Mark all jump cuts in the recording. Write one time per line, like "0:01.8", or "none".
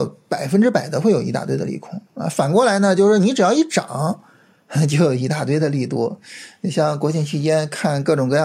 none